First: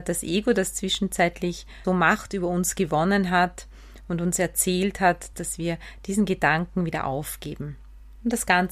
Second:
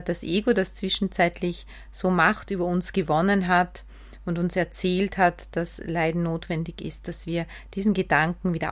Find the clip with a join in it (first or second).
first